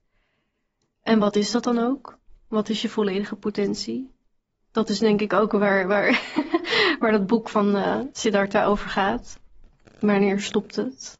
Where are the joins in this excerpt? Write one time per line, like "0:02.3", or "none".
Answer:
none